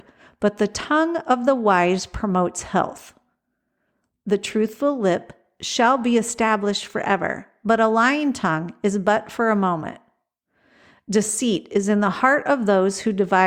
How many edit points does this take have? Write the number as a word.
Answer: zero